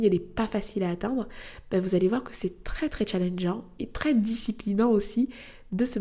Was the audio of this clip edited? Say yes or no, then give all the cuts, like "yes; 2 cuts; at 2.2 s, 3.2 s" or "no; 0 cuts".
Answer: no; 0 cuts